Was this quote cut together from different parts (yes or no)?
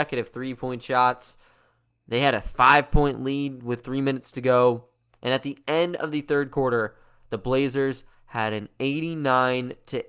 no